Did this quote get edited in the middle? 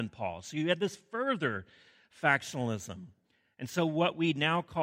yes; 1 cut; at 3.5 s

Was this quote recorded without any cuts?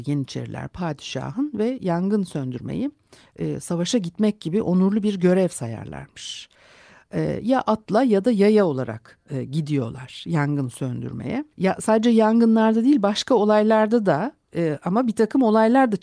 no; 1 cut; at 11.5 s

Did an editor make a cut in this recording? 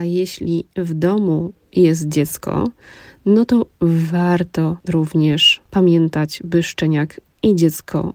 no; 0 cuts

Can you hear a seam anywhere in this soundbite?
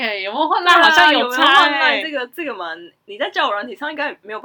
no; 0 cuts

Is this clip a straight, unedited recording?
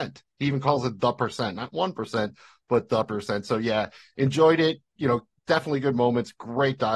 yes; 0 cuts

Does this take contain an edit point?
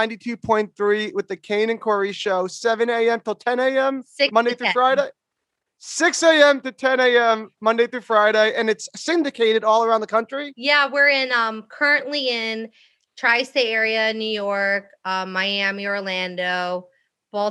no; 0 cuts

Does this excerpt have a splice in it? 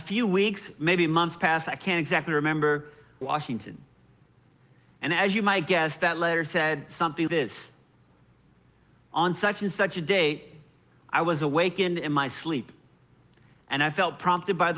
yes; 2 cuts; at 3.2 s, 7.3 s

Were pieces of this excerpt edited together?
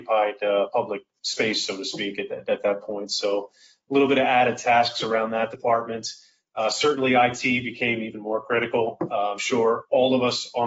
no; 0 cuts

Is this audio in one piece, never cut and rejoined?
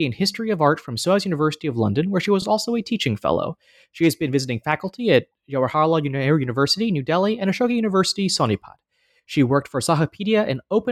yes; 0 cuts

